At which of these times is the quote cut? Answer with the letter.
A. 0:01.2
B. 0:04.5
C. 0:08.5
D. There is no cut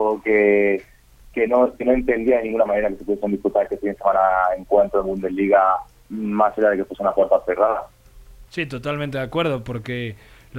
C